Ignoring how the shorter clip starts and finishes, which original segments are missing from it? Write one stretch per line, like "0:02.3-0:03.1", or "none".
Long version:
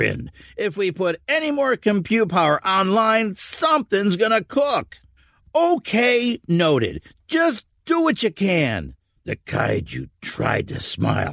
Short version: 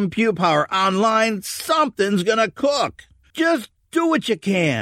0:05.2-0:07.2